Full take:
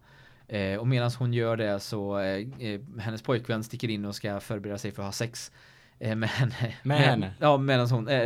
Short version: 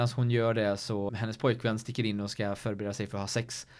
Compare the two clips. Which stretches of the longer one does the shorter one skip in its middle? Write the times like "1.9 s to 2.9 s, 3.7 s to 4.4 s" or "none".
2.1 s to 2.9 s